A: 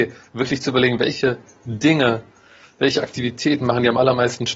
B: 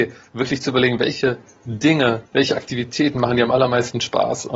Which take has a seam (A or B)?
B